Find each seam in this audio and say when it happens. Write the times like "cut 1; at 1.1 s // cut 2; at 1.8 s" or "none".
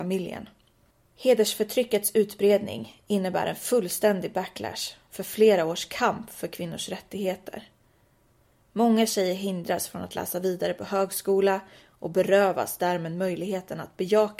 none